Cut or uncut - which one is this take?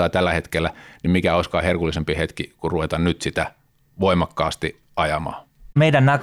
uncut